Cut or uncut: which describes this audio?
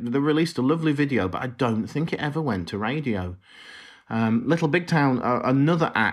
uncut